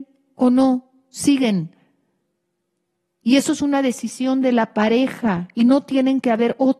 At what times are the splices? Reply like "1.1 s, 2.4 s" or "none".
none